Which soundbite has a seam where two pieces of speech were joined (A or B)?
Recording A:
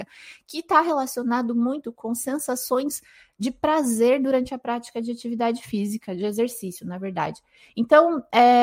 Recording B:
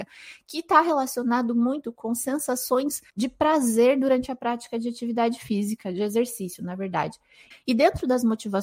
B